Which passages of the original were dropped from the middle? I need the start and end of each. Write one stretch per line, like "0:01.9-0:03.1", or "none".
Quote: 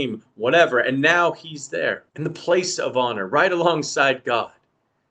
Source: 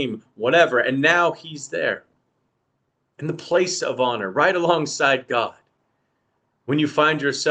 0:02.1-0:03.1